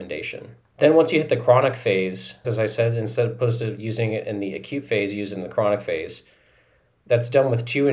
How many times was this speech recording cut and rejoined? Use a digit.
1